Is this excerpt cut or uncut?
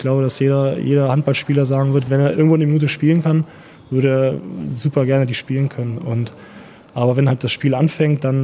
uncut